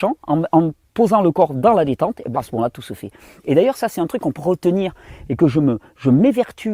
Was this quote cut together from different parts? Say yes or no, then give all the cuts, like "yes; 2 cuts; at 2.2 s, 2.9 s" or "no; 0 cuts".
yes; 2 cuts; at 2.3 s, 4.4 s